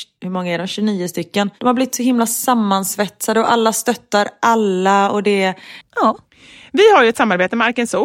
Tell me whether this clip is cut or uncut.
cut